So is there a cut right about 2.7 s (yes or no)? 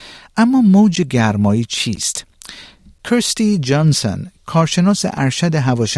no